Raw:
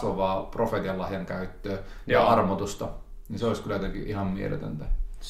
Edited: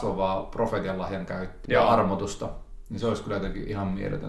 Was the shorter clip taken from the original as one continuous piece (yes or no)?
no